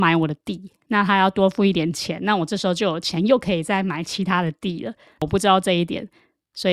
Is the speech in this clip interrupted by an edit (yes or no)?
no